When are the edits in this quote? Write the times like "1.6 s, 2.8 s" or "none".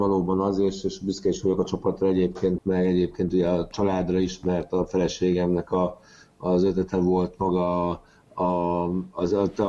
2.6 s